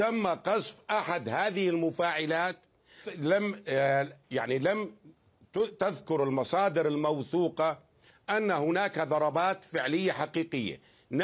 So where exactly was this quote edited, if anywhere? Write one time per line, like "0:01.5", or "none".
0:03.0